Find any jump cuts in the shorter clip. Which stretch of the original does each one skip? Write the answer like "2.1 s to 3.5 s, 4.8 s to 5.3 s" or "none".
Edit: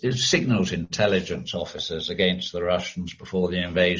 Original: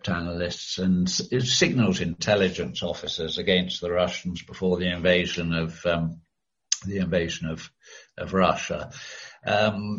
none

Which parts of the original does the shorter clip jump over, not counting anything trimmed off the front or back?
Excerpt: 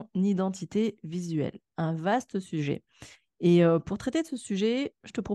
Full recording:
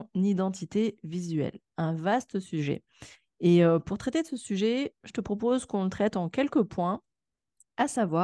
none

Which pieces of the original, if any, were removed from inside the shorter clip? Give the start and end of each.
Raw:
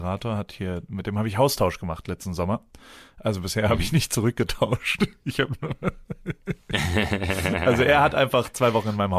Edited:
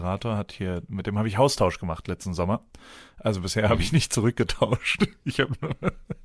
none

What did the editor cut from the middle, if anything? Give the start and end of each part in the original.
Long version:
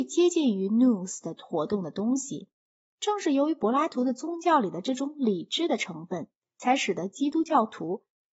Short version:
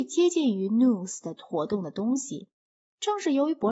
none

